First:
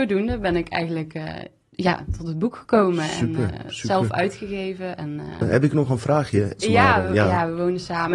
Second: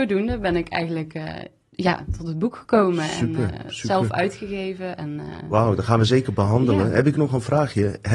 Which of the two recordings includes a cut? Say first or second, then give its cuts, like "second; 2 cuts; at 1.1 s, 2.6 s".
first; 2 cuts; at 5.4 s, 6.6 s